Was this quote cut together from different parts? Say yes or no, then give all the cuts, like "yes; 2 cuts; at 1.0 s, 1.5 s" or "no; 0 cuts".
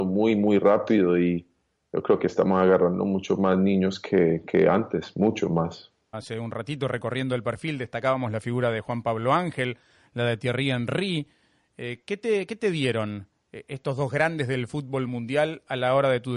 yes; 1 cut; at 6.1 s